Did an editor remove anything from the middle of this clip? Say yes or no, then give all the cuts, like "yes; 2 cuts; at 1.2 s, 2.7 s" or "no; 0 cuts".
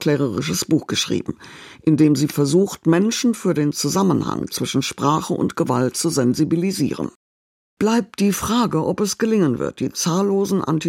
no; 0 cuts